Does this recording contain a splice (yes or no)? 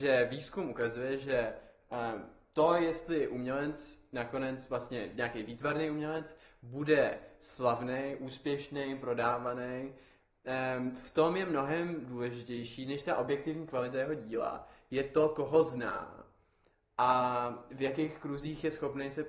no